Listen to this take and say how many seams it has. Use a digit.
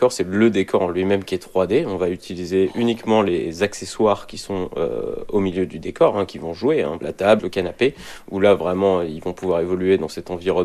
1